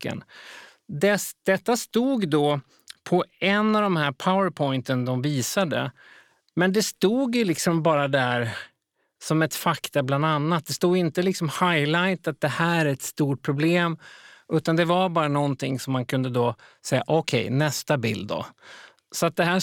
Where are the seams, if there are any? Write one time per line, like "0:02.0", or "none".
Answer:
none